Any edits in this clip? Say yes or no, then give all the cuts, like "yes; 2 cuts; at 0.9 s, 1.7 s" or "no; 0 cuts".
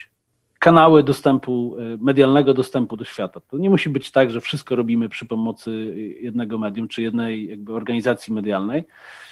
no; 0 cuts